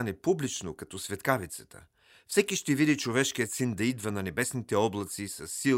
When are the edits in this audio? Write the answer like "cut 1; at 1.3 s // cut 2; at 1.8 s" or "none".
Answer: none